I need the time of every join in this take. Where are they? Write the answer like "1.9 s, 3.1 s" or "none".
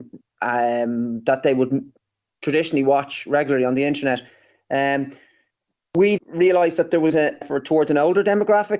6.2 s, 7.4 s